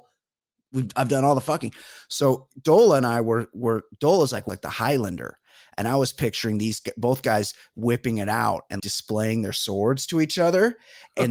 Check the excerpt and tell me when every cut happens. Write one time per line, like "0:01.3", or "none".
0:04.5
0:08.8